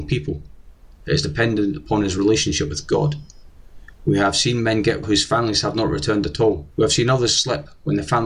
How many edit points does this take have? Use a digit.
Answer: 2